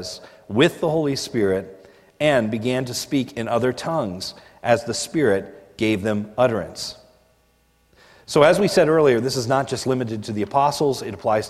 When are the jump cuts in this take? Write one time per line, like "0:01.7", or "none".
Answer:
none